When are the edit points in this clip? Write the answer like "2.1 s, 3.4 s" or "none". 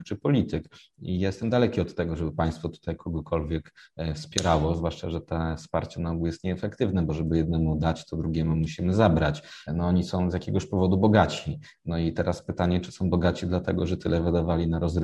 9.7 s

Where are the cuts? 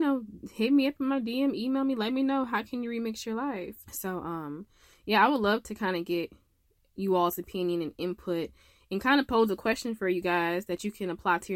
3.8 s

